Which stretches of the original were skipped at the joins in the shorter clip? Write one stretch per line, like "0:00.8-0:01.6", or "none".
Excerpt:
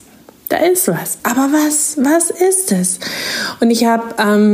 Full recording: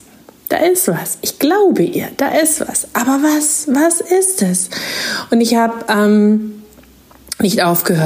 0:01.2-0:02.9

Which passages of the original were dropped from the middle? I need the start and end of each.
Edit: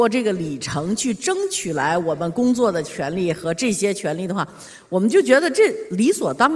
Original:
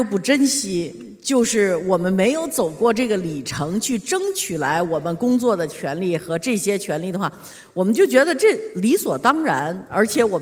none

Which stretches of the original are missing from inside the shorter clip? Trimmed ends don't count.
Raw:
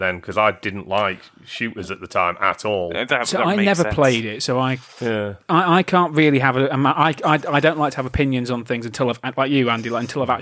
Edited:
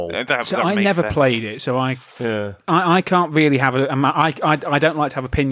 none

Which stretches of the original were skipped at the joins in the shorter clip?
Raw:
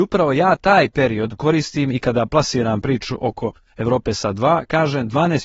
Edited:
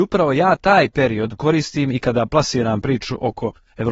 none

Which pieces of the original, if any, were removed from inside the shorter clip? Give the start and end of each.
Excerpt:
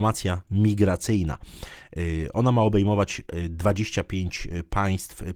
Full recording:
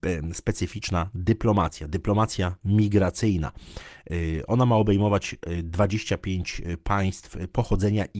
none

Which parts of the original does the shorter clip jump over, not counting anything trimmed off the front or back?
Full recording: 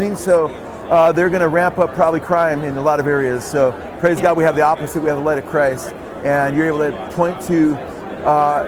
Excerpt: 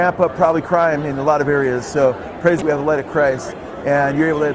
0:04.2-0:05.0

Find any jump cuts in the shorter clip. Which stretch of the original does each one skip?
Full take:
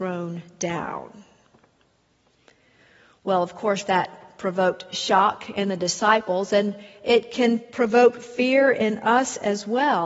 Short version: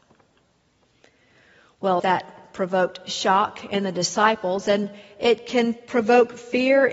0:03.4-0:03.8

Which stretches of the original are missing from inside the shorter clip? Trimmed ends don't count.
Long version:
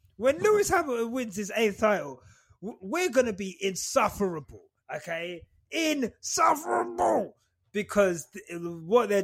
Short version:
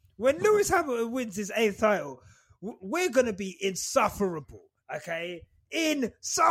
none

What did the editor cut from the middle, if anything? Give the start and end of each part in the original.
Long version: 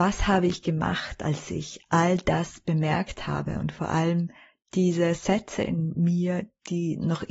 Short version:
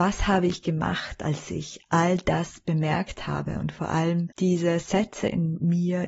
0:04.3-0:04.7

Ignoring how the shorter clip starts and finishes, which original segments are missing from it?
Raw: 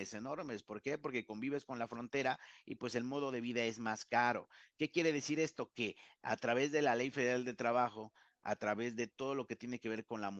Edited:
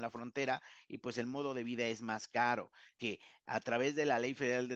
0:04.7-0:05.7

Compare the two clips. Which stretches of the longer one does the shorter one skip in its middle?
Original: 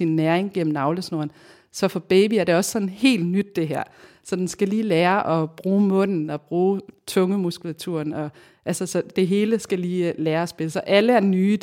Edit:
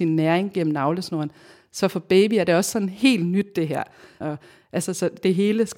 0:04.2-0:08.1

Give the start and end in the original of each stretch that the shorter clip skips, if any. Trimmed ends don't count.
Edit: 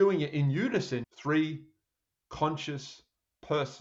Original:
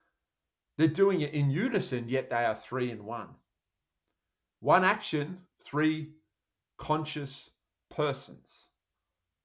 0:02.0-0:05.5

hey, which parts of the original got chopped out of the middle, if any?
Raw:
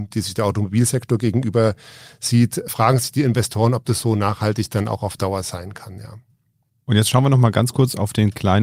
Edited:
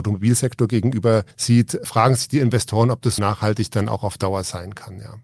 0:01.8-0:02.1
0:04.0-0:04.2

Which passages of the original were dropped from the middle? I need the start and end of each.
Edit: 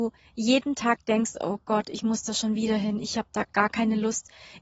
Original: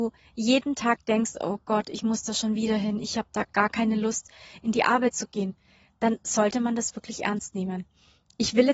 none

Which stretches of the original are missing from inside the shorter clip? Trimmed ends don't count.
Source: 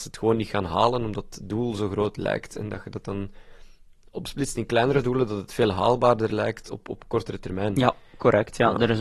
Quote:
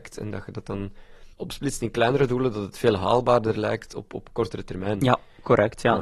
0:03.7-0:04.1

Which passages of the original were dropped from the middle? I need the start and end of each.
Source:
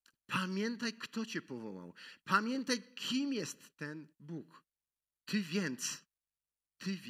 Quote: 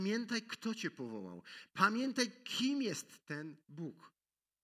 none

